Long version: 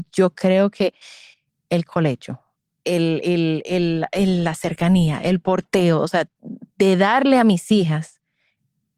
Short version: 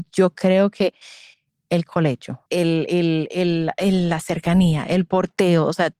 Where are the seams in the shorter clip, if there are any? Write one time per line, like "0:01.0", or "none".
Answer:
0:02.5